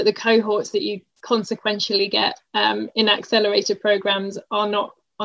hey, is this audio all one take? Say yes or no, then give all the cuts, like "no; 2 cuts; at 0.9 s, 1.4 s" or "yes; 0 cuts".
yes; 0 cuts